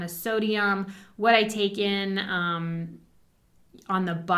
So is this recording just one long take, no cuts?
yes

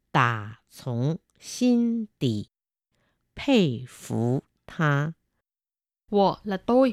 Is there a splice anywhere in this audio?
no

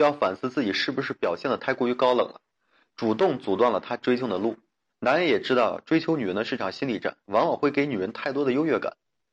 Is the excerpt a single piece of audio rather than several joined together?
no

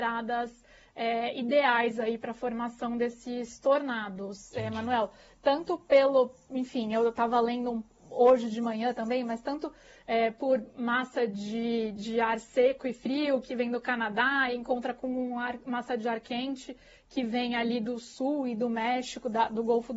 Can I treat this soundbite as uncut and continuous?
yes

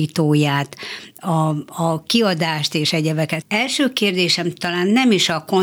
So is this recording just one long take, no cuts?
no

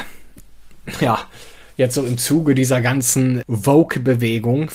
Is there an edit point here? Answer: yes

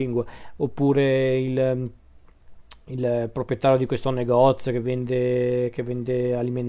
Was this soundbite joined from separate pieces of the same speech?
no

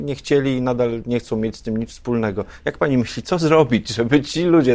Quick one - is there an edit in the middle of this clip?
no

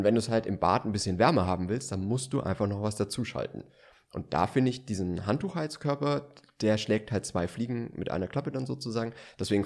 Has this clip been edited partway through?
no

